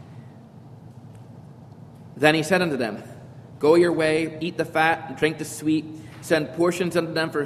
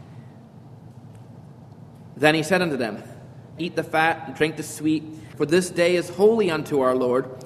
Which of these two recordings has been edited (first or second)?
second